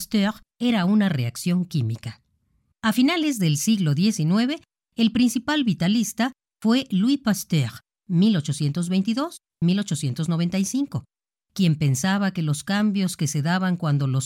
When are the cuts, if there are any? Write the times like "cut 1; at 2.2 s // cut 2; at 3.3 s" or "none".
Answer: cut 1; at 2.7 s